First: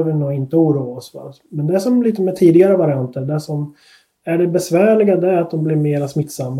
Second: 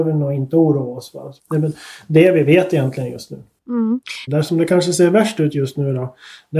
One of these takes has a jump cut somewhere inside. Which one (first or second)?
second